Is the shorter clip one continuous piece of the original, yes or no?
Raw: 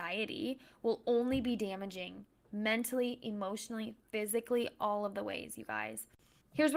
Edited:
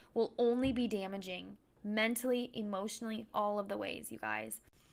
no